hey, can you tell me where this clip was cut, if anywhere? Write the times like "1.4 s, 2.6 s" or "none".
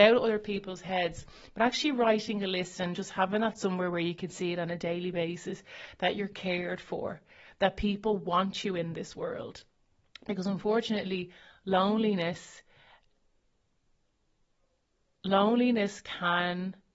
none